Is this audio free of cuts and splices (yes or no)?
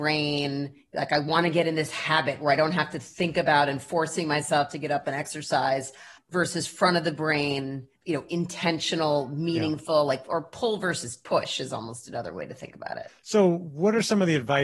no